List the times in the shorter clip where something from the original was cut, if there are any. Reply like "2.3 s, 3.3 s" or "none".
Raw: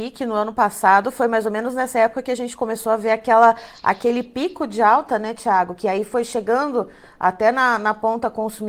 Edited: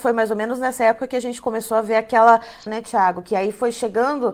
2.7 s